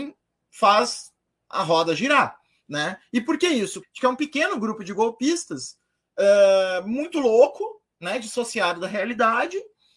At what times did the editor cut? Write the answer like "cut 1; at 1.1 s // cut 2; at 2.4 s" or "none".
cut 1; at 3.8 s